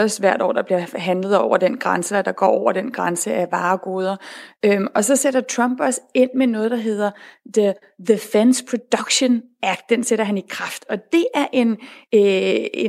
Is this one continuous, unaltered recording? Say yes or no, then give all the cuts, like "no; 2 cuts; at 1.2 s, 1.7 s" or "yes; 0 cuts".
yes; 0 cuts